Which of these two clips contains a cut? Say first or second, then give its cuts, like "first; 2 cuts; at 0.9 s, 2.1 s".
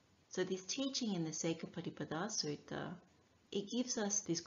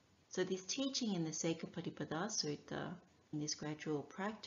second; 1 cut; at 3.3 s